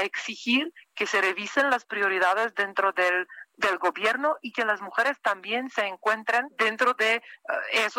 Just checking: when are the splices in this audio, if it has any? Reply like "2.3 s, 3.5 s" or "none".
6.5 s